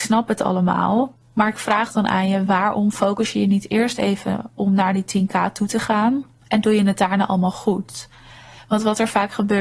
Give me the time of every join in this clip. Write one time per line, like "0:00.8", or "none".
none